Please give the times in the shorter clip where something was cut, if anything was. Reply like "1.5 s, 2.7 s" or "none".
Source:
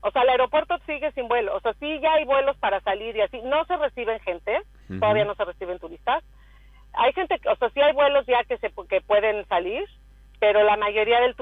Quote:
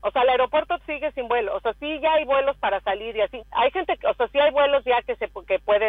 3.4 s